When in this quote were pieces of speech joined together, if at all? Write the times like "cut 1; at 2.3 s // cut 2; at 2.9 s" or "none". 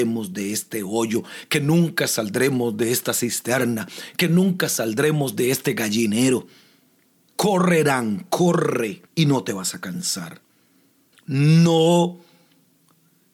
cut 1; at 7.3 s // cut 2; at 9.1 s // cut 3; at 11.1 s